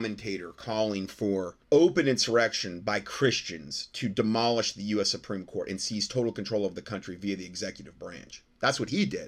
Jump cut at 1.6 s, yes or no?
yes